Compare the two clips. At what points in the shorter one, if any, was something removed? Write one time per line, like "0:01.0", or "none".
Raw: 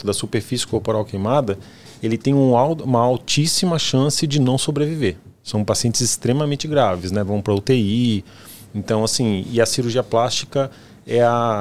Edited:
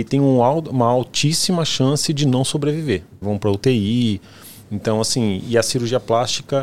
0:03.2